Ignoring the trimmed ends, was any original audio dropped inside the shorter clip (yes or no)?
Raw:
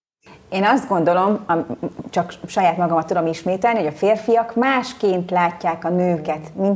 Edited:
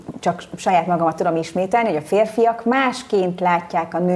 no